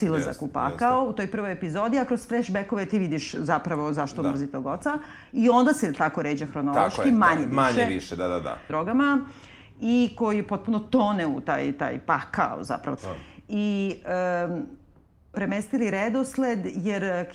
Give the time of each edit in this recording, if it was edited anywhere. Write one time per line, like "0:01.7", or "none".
0:08.7
0:13.0
0:15.3